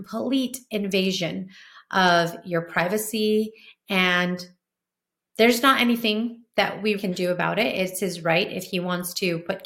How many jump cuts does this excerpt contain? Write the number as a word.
one